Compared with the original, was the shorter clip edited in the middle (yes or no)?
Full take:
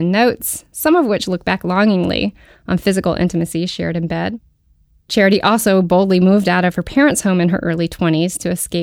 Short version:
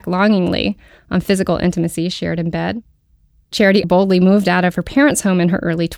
yes